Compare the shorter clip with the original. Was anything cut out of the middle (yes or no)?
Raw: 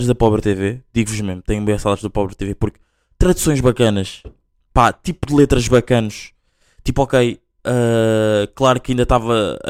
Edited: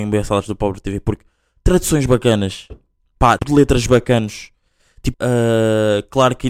yes